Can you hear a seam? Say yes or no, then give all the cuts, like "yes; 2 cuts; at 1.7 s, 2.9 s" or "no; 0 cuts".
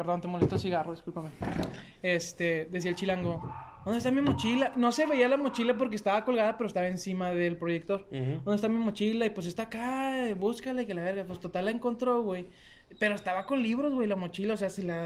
no; 0 cuts